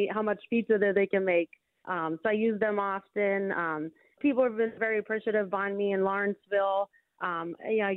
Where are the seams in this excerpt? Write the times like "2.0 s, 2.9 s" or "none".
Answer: 4.2 s